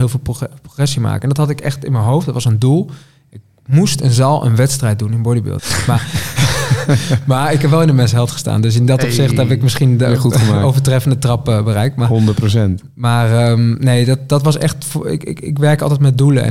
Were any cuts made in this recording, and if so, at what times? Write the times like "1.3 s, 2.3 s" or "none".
5.6 s